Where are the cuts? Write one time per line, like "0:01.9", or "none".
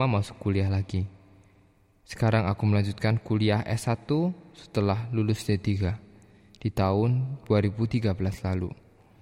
none

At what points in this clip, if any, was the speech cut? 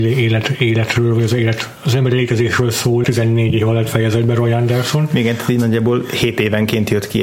0:03.0

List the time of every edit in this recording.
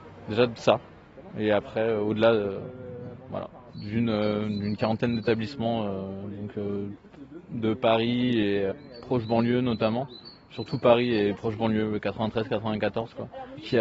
0:03.7
0:04.8

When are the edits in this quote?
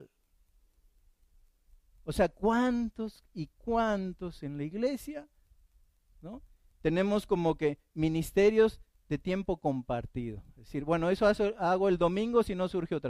none

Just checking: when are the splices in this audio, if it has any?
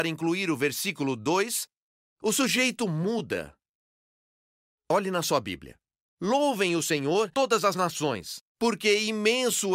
0:08.4

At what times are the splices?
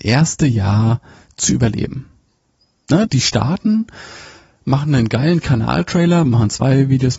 0:03.1
0:06.2

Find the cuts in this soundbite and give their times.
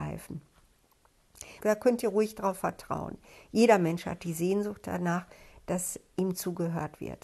0:01.6

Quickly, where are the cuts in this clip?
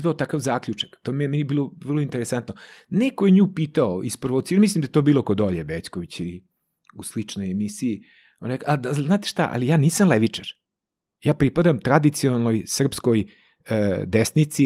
none

